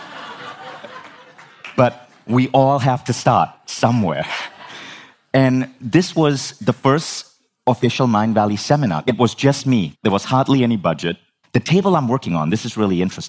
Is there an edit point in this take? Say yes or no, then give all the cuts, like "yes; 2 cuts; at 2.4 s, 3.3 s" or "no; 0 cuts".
yes; 2 cuts; at 9.9 s, 11.4 s